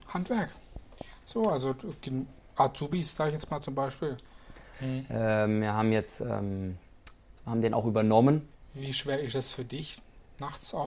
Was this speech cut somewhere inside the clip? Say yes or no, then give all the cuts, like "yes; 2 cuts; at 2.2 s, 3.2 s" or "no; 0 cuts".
yes; 3 cuts; at 4.7 s, 7.4 s, 8.5 s